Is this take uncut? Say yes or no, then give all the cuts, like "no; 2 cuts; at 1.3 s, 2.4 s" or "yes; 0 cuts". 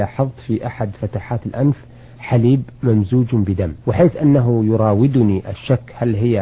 no; 1 cut; at 3.8 s